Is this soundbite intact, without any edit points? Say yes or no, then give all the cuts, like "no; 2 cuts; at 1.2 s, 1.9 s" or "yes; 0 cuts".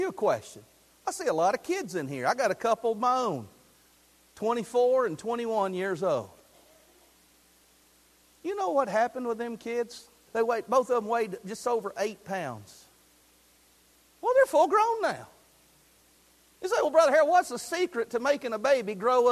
no; 1 cut; at 10.3 s